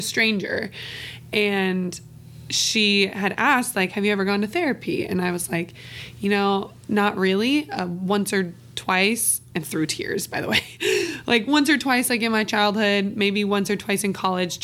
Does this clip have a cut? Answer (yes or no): no